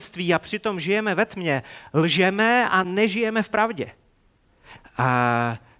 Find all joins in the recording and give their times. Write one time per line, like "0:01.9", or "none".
0:04.8